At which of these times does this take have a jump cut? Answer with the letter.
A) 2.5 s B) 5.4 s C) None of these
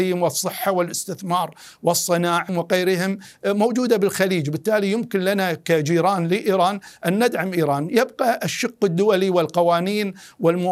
A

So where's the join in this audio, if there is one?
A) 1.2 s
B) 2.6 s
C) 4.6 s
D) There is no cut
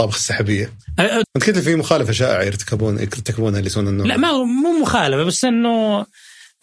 A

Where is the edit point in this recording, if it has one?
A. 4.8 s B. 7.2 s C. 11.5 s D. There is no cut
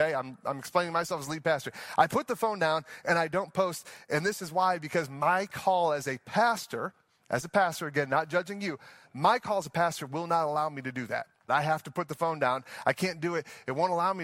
C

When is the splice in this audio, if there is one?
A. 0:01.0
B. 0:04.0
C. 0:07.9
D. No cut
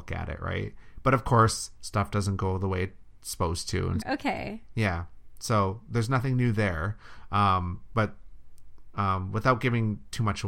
B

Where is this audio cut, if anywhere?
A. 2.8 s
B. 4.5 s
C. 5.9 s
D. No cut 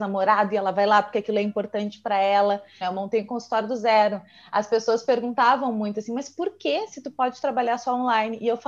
A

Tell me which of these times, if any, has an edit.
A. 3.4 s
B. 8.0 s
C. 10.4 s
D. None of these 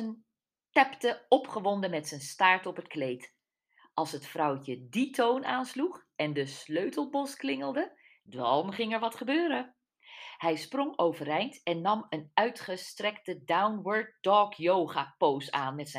D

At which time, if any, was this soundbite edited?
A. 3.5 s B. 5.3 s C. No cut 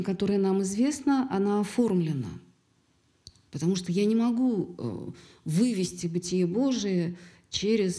A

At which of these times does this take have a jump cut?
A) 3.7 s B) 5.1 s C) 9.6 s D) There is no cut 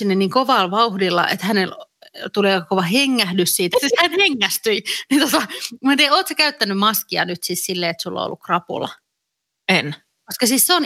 A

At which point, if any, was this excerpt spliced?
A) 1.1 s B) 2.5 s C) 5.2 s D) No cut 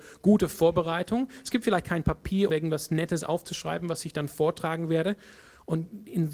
B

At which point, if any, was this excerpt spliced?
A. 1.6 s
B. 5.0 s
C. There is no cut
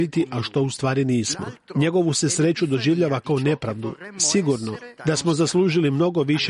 B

